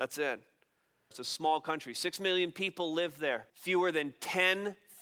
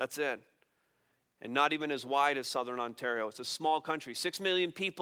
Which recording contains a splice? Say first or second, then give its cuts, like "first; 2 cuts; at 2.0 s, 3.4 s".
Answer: first; 2 cuts; at 1.1 s, 3.5 s